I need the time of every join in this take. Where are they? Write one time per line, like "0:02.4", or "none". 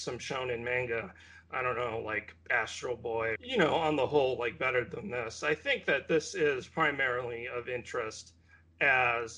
0:03.4

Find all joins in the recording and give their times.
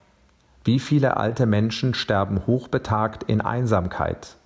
none

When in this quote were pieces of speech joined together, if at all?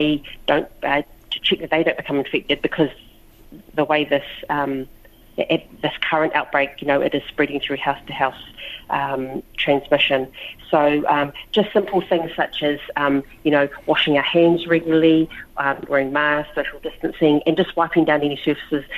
none

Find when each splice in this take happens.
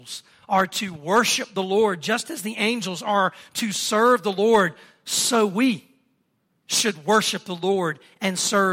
none

